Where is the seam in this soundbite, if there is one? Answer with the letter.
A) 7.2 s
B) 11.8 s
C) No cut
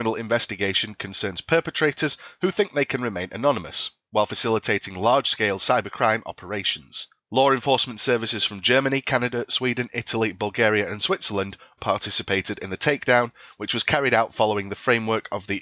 B